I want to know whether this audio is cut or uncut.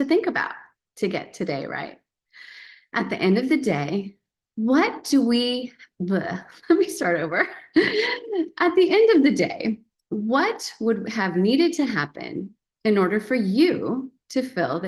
uncut